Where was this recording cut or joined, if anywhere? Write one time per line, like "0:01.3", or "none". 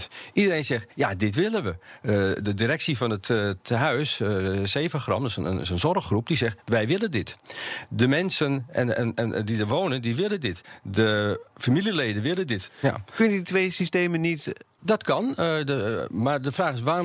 0:12.7
0:14.8